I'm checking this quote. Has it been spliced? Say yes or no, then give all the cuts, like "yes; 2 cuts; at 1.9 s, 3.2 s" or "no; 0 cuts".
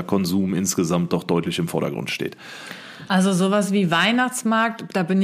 no; 0 cuts